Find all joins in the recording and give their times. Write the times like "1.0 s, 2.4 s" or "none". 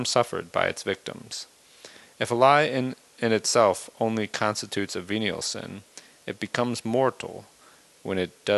none